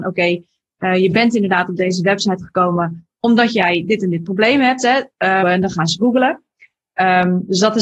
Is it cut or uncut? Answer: cut